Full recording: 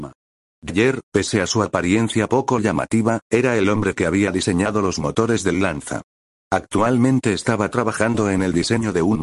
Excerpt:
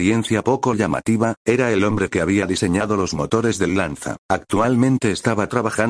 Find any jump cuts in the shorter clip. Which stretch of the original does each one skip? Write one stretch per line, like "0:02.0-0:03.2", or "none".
0:06.1-0:06.4